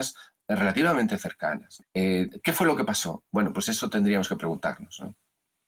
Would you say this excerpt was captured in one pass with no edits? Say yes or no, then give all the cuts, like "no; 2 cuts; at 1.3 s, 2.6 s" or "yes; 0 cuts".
no; 1 cut; at 1.8 s